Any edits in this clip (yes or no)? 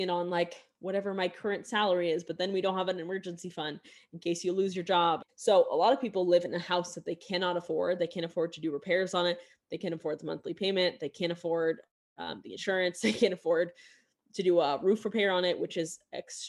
yes